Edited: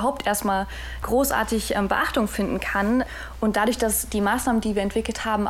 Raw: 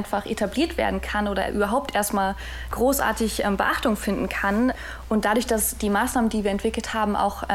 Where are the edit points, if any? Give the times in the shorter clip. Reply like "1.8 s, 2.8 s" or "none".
none